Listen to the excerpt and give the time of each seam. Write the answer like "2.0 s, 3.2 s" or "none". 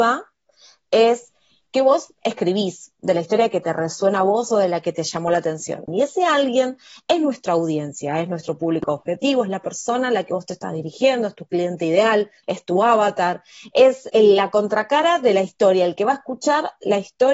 5.9 s, 12.4 s, 14.1 s